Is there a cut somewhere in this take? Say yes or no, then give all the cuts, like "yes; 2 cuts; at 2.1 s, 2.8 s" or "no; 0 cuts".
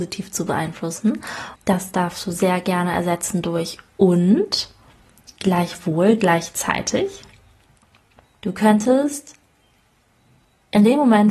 yes; 2 cuts; at 1.6 s, 8.2 s